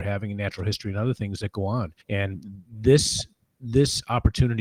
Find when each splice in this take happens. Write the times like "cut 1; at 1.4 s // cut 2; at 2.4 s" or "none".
cut 1; at 2.0 s